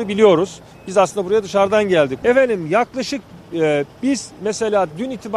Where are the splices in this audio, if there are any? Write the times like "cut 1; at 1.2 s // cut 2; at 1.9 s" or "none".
cut 1; at 2.2 s